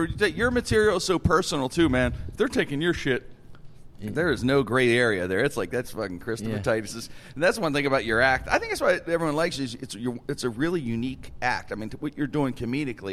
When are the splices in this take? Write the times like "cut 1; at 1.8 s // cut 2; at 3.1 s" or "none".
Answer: none